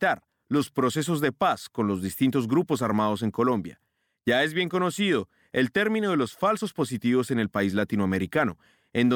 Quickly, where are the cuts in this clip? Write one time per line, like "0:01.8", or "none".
none